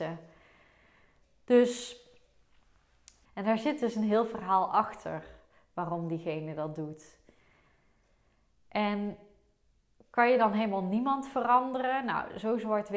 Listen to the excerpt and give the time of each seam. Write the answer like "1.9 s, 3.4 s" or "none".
3.3 s

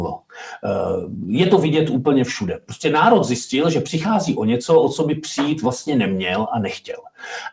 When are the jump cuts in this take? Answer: none

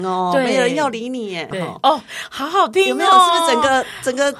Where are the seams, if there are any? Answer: 1.5 s

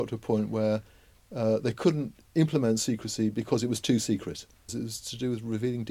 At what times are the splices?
4.7 s

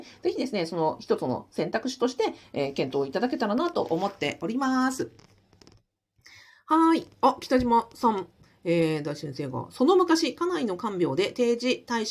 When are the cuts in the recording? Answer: none

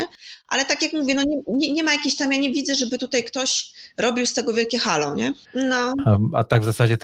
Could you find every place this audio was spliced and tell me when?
5.4 s

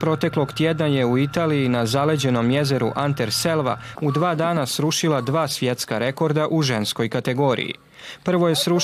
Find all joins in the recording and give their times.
3.9 s

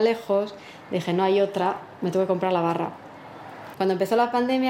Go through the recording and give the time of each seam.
3.7 s

